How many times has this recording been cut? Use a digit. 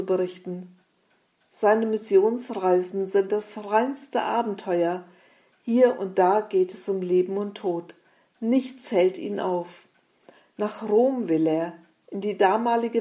0